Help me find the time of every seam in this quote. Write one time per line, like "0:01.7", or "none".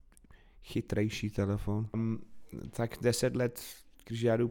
0:01.9